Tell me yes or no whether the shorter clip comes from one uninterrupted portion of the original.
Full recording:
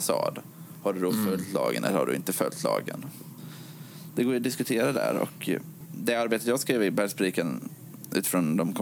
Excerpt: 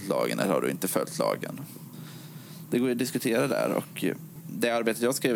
yes